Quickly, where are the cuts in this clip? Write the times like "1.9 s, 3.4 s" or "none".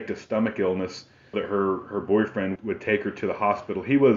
1.3 s, 2.6 s